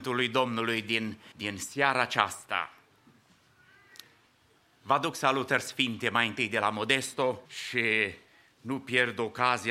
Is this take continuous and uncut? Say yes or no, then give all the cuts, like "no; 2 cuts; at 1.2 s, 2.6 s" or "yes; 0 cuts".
no; 2 cuts; at 1.3 s, 7.5 s